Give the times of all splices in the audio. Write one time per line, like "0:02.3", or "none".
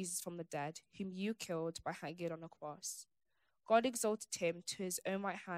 none

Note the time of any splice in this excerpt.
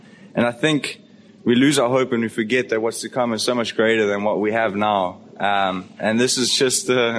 none

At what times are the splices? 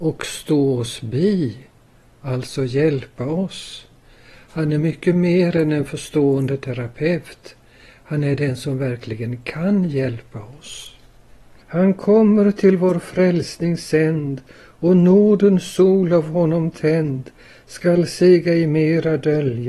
0:11.6

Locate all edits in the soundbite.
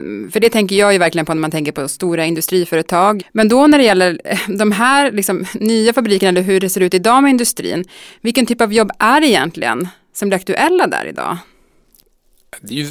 0:03.2

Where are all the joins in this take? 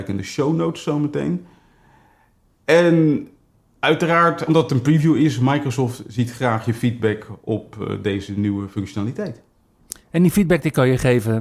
none

